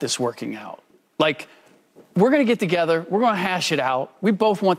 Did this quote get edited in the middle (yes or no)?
no